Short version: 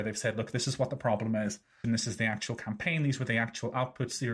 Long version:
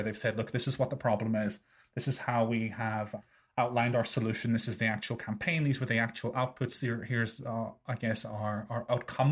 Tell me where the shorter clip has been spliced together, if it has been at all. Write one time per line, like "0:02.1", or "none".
0:01.8